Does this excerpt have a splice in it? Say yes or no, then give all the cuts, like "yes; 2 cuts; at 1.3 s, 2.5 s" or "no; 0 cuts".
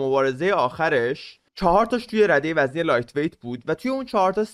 yes; 1 cut; at 1.5 s